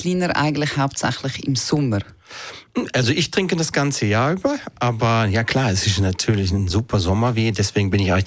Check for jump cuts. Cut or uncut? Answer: cut